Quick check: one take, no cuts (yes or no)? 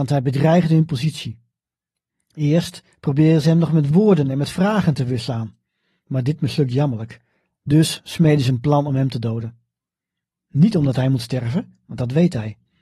no